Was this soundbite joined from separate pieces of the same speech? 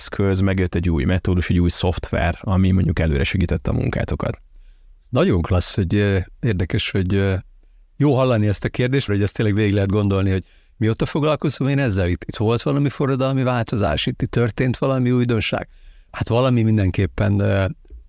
yes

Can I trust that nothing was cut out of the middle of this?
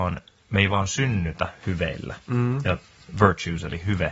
yes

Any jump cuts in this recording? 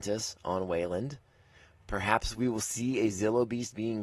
no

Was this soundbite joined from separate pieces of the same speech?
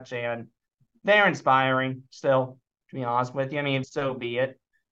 yes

